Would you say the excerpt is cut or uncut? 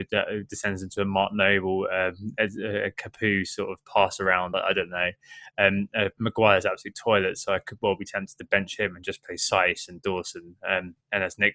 uncut